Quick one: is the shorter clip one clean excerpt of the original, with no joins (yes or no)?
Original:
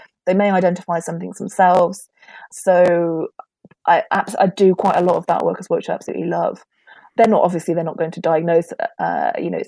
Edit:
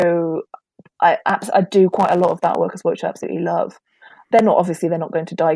yes